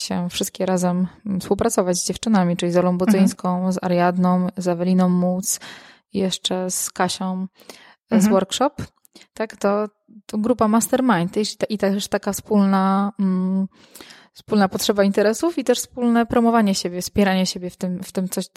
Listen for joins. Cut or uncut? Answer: uncut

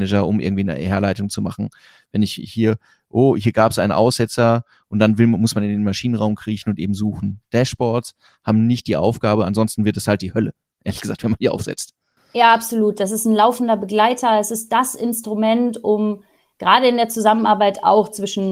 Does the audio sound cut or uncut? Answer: uncut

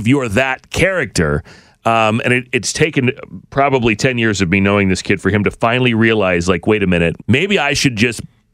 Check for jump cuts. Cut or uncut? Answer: cut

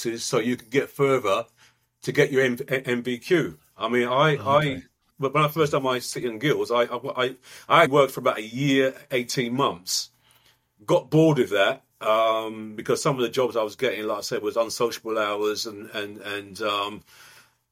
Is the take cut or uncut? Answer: cut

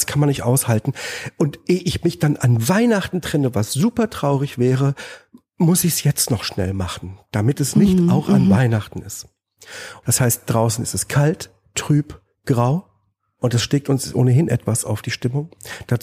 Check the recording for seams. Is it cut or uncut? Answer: cut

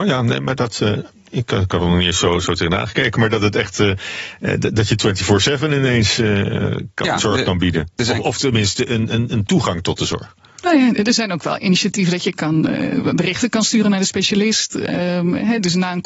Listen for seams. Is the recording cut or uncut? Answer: cut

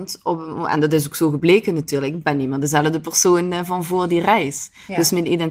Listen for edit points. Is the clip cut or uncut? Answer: uncut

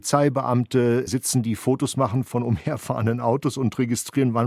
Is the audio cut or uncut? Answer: uncut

